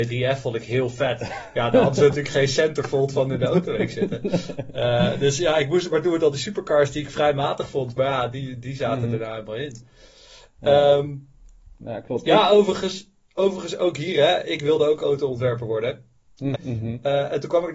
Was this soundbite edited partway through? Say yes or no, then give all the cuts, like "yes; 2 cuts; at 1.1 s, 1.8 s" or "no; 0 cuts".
yes; 1 cut; at 16.5 s